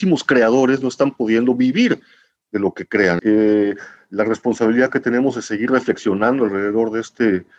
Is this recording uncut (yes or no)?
no